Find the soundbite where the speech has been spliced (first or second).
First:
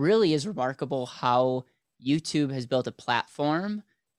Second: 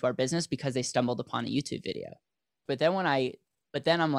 second